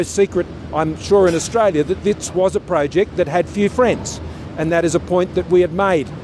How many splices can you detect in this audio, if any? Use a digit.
0